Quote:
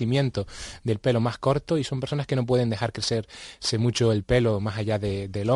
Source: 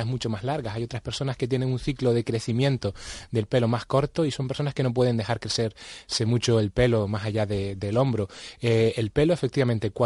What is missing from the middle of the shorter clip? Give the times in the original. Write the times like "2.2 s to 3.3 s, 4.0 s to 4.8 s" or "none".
none